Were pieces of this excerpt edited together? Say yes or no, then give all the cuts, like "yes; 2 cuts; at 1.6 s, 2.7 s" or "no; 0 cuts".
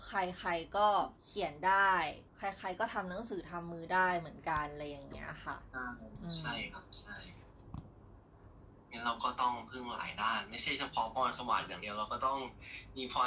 yes; 2 cuts; at 1.2 s, 2.3 s